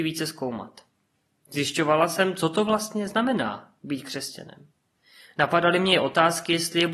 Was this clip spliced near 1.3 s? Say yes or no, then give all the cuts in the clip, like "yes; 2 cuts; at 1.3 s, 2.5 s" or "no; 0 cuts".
no; 0 cuts